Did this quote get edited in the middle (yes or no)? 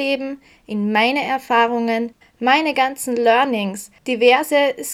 yes